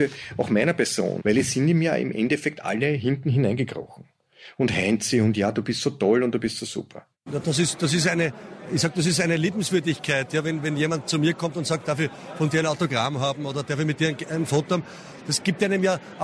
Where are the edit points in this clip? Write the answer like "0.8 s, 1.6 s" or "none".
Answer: 7.3 s